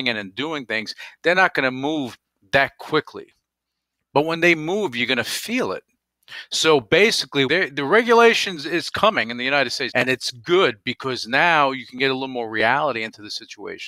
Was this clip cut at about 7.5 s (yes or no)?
yes